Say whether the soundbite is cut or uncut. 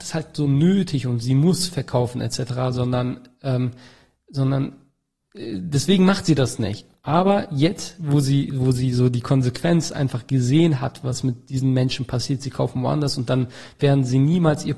uncut